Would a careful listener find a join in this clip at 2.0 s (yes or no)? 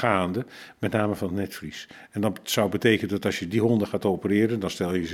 no